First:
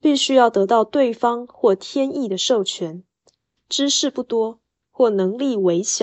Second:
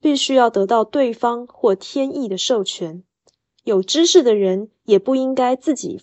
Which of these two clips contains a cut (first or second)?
first